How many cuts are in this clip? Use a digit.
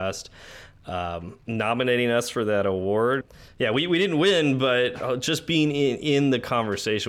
1